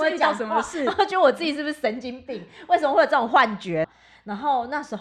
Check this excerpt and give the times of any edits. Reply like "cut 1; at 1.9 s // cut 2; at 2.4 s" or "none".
cut 1; at 3.8 s

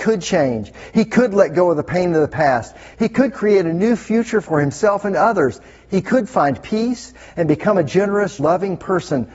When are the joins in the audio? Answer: cut 1; at 2.9 s // cut 2; at 8.4 s

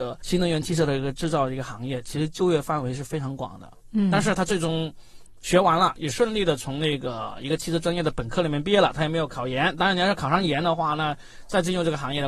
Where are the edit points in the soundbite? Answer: none

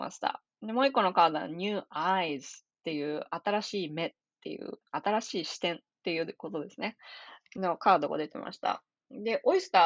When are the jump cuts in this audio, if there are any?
cut 1; at 4.8 s

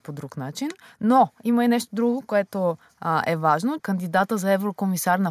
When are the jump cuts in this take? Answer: cut 1; at 3.8 s

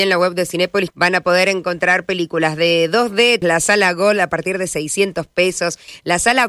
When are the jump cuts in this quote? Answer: cut 1; at 0.9 s // cut 2; at 3.4 s

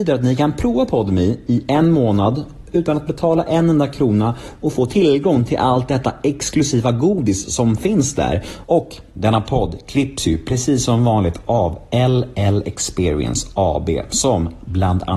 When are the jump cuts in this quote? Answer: cut 1; at 8.6 s

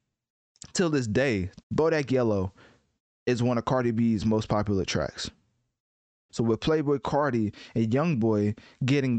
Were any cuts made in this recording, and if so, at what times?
cut 1; at 1.6 s // cut 2; at 6.3 s

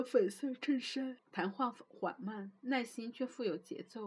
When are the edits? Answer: cut 1; at 1.2 s

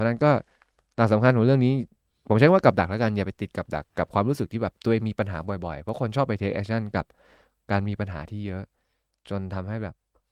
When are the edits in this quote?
cut 1; at 3.8 s

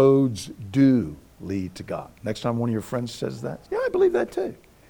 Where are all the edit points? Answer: cut 1; at 3.6 s

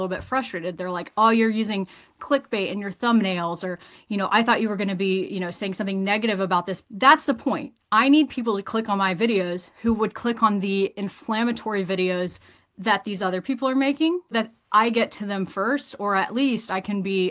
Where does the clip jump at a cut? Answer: cut 1; at 6.8 s // cut 2; at 14.3 s

